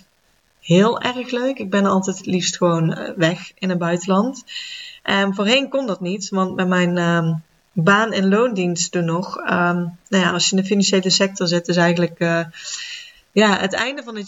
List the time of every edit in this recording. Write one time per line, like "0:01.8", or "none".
none

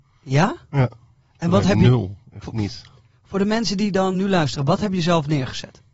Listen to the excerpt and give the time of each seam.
0:04.1

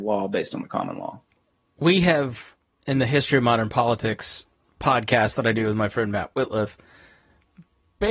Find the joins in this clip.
none

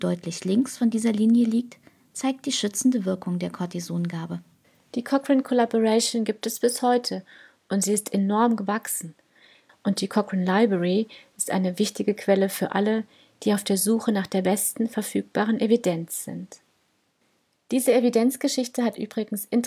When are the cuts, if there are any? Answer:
0:09.7

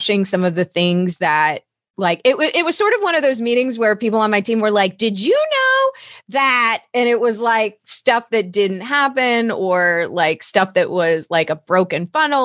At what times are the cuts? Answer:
none

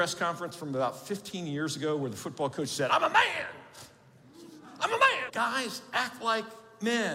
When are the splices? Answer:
0:05.3

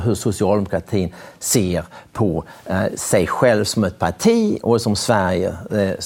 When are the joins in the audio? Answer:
none

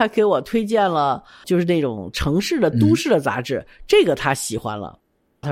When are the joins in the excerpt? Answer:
0:01.4

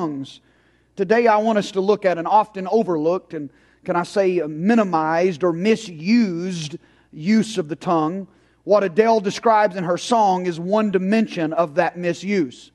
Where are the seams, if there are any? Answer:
none

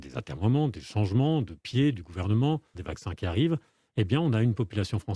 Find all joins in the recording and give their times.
0:02.7

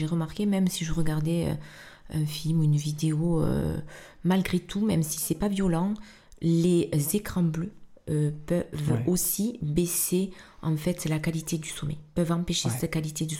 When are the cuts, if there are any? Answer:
none

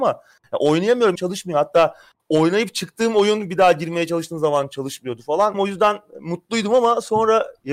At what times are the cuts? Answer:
0:01.1
0:05.5

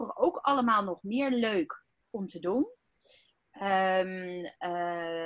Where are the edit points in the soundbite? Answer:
0:03.4

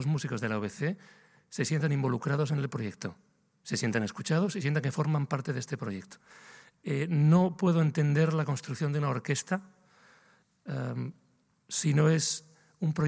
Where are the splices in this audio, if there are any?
none

